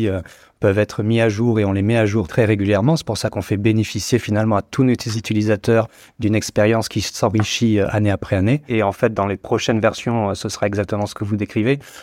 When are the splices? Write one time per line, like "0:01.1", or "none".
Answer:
0:02.3
0:08.7